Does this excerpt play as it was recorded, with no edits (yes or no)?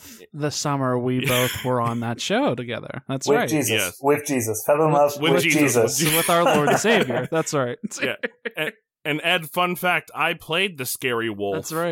yes